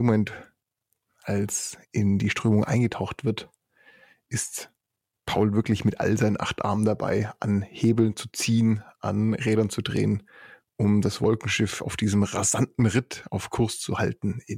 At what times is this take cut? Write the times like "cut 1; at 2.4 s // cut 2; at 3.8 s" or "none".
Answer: none